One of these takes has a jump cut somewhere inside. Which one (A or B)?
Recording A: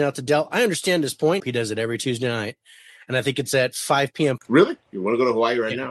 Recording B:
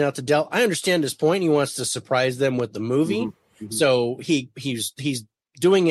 A